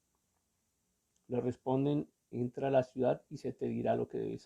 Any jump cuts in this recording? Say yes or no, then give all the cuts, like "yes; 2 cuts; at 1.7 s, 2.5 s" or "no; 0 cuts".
yes; 1 cut; at 2.3 s